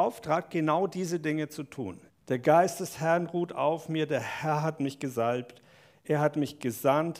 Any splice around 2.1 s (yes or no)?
yes